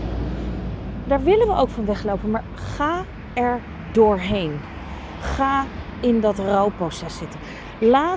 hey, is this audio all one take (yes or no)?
yes